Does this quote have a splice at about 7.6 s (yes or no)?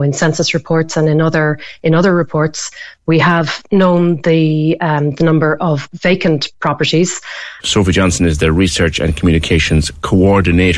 yes